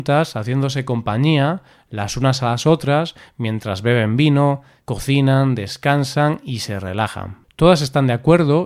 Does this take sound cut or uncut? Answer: cut